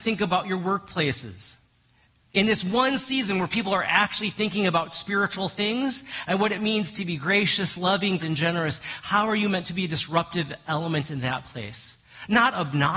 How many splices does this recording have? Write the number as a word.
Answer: one